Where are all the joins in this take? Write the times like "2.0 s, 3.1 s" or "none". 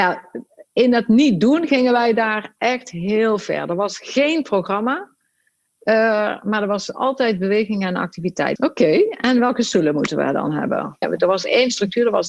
8.6 s, 11.0 s

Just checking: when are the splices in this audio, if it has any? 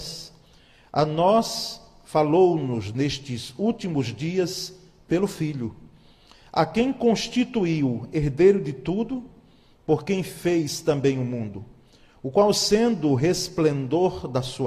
none

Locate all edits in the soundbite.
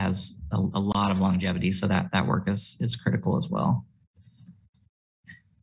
none

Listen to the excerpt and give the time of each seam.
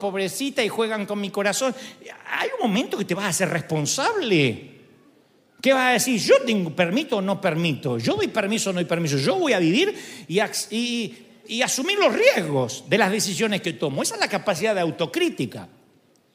none

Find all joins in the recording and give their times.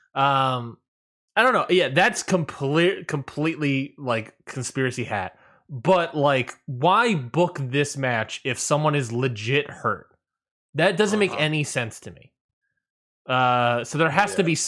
none

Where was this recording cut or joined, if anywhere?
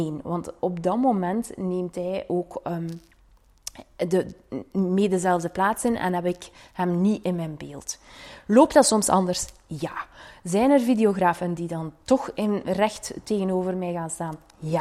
none

